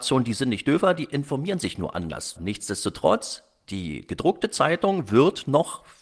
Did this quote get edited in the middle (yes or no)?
yes